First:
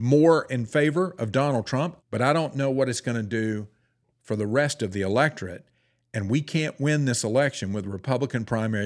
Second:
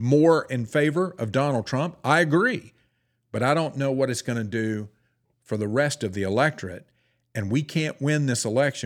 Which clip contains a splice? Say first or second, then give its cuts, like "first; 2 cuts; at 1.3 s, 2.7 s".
first; 1 cut; at 2.0 s